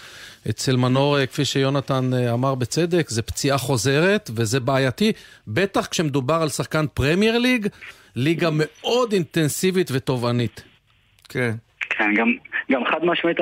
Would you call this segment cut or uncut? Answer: uncut